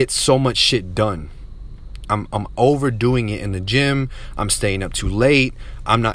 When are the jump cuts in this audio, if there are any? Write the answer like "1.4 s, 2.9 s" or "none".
2.1 s